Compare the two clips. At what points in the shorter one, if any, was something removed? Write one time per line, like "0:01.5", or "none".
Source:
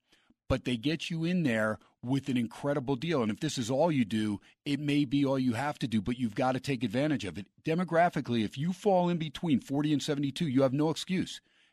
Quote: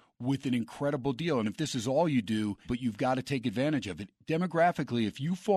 0:02.6